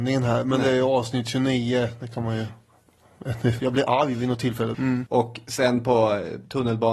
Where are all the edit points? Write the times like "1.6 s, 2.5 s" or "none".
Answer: 3.6 s, 4.7 s